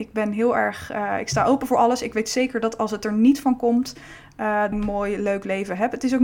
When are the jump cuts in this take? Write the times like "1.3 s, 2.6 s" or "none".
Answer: 4.7 s